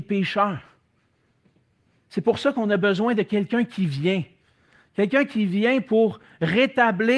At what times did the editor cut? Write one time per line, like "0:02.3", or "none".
none